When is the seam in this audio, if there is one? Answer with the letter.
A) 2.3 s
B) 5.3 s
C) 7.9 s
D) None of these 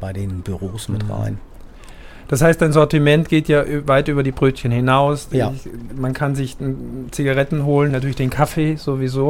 C